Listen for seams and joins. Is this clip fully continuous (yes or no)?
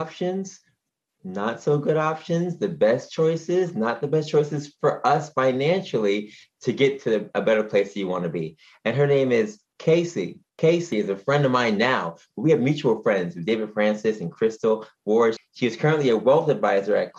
no